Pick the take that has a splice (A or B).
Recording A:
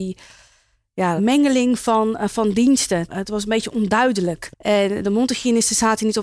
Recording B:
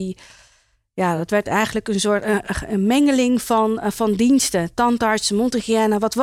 A